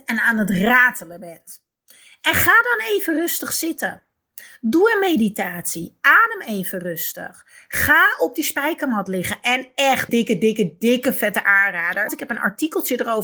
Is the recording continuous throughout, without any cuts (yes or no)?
no